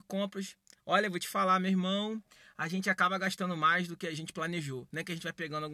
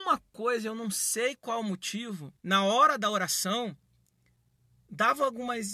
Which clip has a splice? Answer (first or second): second